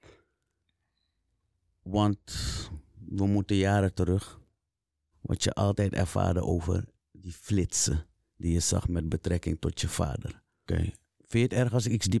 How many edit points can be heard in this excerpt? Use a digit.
2